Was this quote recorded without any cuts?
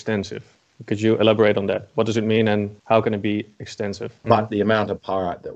no; 2 cuts; at 2.8 s, 4.2 s

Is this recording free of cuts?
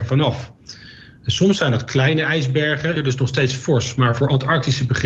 no; 1 cut; at 3.0 s

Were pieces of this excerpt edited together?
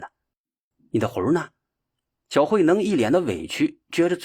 yes; 1 cut; at 1.8 s

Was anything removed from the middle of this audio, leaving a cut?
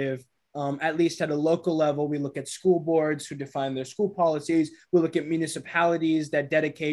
no; 0 cuts

